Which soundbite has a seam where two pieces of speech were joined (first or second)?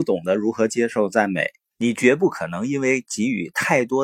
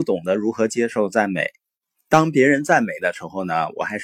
first